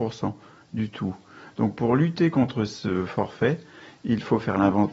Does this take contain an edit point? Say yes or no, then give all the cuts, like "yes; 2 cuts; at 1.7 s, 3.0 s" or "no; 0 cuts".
no; 0 cuts